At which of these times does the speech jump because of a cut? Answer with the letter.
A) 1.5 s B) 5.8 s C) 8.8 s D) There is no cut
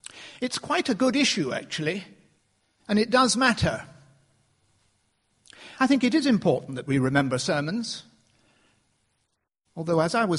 D